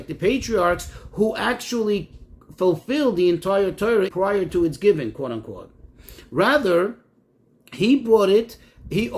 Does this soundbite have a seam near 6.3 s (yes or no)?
no